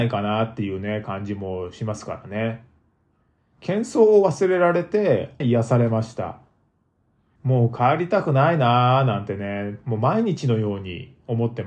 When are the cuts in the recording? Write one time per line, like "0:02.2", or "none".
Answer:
0:05.4